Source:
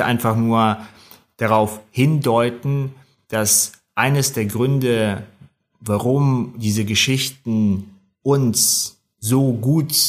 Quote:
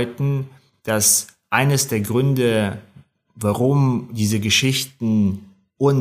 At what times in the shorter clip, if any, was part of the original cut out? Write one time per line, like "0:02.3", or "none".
none